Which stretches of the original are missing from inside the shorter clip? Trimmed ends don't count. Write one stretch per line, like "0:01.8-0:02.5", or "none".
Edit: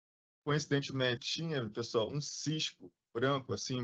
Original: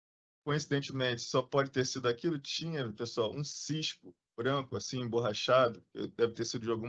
0:01.2-0:02.4